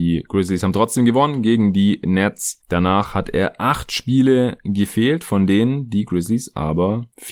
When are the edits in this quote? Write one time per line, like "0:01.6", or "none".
none